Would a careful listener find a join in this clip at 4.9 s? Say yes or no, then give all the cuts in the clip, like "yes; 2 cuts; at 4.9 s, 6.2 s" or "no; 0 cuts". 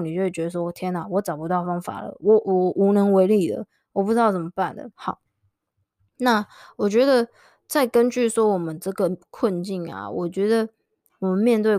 yes; 1 cut; at 4.9 s